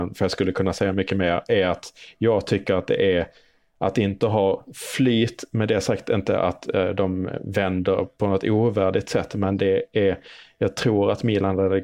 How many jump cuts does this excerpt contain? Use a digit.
0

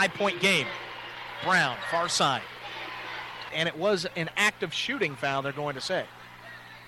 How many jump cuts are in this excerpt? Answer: 1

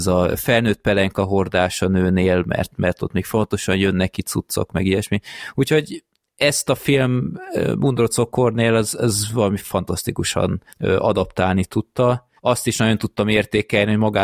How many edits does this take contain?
2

